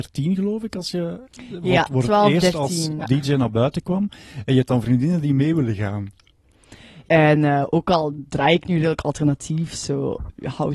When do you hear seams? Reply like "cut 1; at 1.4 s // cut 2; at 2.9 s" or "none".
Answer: cut 1; at 3.0 s // cut 2; at 7.1 s